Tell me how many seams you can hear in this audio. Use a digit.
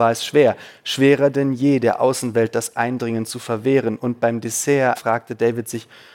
1